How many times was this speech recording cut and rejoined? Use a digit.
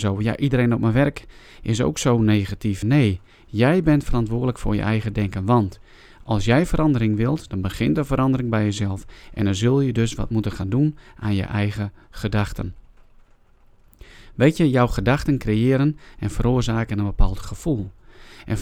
1